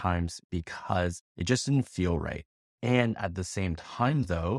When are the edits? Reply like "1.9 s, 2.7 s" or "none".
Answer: 2.6 s